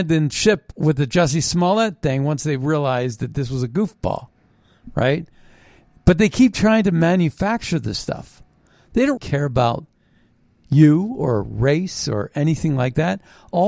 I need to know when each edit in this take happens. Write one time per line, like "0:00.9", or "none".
0:09.2